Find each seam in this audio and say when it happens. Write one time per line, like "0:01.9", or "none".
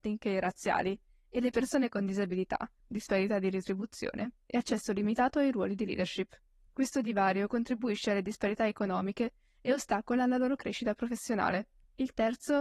0:02.8